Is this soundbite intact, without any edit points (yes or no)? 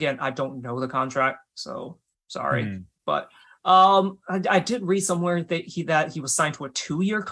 yes